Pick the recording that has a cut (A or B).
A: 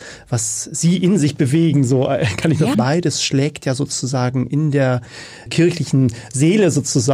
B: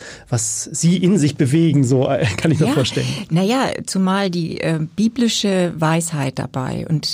A